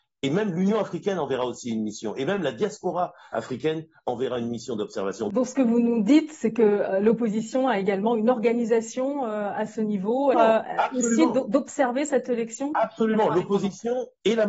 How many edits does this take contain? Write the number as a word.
one